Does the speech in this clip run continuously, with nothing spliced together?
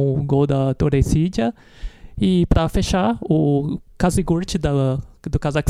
no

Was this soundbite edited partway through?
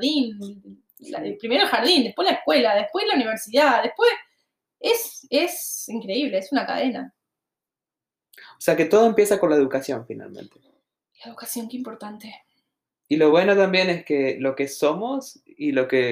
no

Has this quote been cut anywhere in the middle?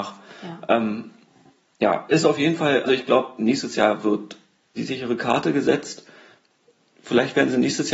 yes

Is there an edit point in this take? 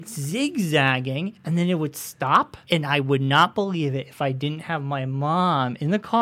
yes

